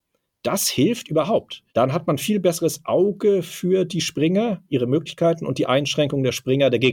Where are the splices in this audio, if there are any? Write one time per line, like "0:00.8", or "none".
0:01.7